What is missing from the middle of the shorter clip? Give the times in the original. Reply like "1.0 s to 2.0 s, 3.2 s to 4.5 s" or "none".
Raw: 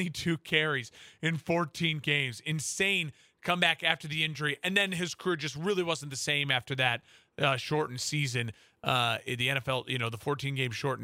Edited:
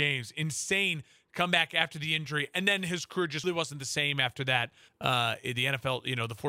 5.5 s to 5.7 s, 7.2 s to 8.7 s